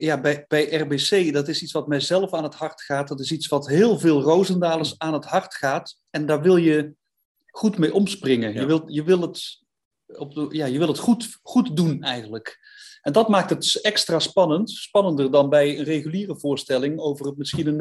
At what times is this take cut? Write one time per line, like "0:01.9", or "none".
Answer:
none